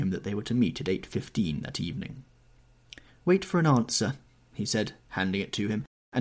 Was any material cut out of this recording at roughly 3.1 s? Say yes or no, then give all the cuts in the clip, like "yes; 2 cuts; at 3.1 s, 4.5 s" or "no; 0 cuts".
no; 0 cuts